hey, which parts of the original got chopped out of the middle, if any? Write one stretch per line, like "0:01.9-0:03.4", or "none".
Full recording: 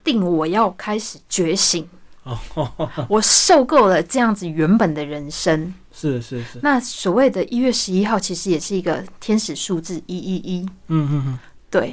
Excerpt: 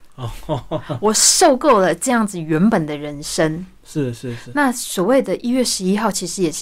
none